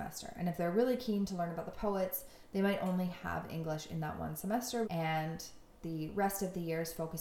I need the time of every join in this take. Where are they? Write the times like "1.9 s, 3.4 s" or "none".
4.8 s